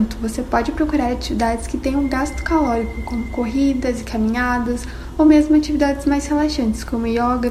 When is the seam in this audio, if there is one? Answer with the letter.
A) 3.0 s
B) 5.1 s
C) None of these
C